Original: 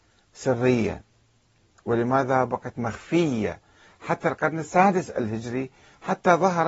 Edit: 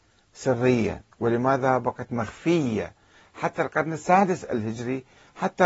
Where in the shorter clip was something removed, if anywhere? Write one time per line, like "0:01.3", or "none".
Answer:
0:01.1